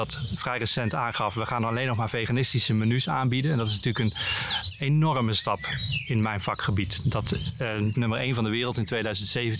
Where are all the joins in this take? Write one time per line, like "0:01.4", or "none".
0:07.9

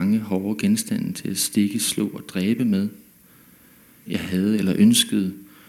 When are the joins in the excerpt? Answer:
0:04.1

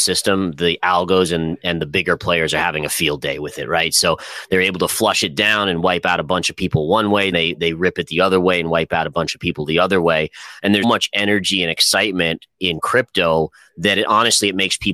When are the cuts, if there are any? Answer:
0:07.3
0:10.8

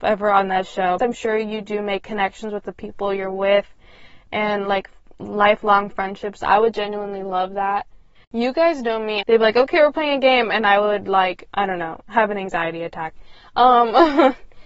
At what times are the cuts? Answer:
0:01.0
0:08.2
0:09.2

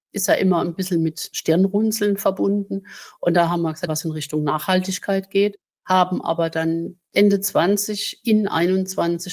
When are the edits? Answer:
0:03.9

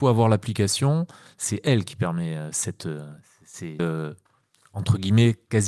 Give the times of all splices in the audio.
0:03.8

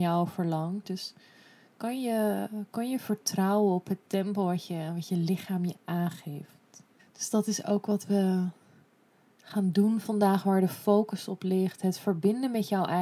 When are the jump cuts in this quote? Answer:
0:07.0

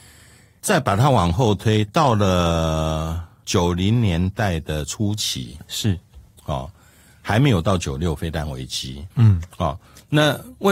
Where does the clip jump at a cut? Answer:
0:09.1

